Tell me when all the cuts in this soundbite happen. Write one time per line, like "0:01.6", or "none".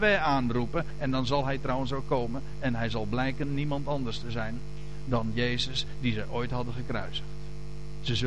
0:00.9